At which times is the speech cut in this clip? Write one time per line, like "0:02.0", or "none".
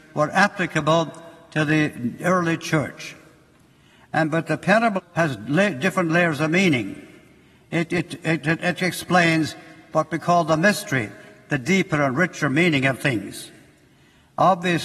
0:05.0